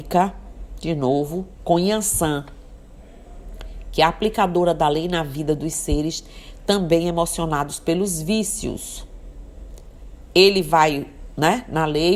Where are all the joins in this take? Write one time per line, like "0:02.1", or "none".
none